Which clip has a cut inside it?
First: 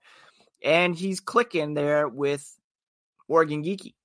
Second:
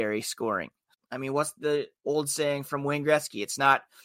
second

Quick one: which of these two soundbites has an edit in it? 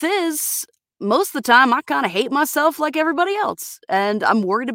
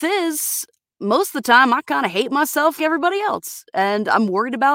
second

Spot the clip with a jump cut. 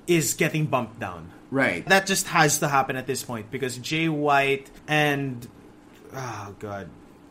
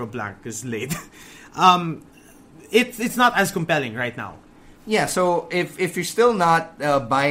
first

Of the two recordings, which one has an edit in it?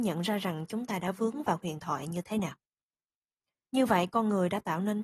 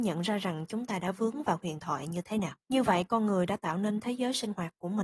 second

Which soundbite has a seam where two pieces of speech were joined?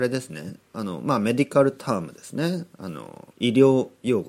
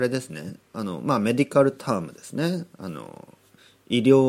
first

